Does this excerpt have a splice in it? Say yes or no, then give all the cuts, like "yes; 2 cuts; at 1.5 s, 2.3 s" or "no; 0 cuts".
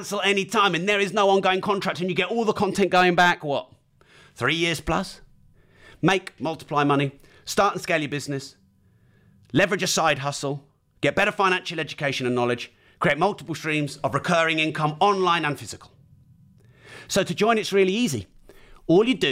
yes; 1 cut; at 6.4 s